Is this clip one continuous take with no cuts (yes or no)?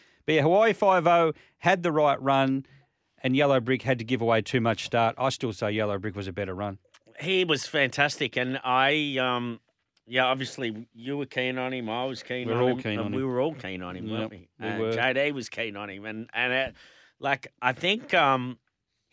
yes